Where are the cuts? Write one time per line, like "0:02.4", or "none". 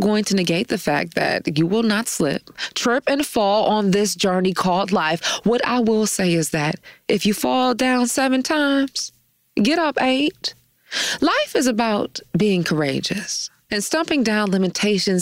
0:13.7